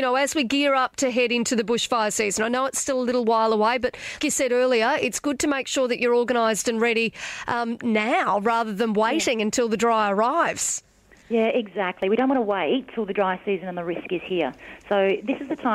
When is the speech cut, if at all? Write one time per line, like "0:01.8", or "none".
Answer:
0:04.2